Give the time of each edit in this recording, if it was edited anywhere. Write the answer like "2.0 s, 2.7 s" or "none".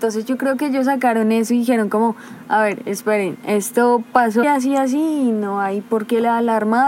4.4 s